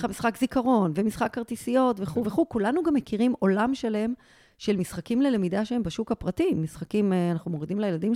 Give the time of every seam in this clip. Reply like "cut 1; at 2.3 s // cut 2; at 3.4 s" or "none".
none